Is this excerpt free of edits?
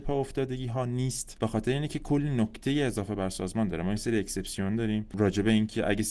yes; 0 cuts

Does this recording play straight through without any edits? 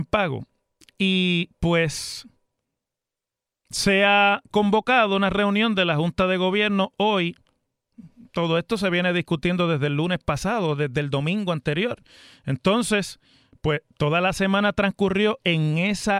yes; 0 cuts

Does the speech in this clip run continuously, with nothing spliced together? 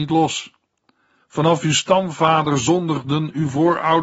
no; 1 cut; at 1.2 s

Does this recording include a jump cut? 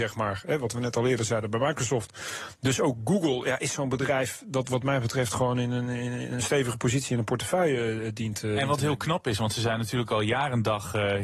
no; 0 cuts

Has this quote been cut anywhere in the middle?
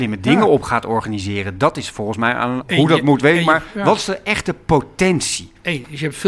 yes; 1 cut; at 2.6 s

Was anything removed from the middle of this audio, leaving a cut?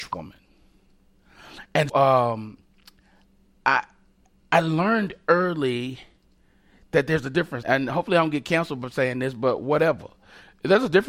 yes; 2 cuts; at 1.9 s, 7.6 s

